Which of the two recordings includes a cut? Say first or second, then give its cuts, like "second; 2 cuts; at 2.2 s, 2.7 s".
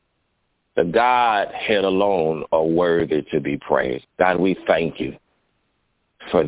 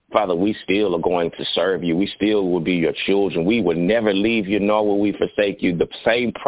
first; 1 cut; at 4.0 s